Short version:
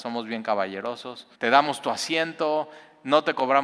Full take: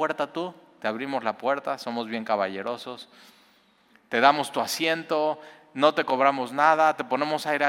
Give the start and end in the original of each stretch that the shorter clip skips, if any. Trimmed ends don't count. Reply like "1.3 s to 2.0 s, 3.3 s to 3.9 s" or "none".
3.2 s to 4.0 s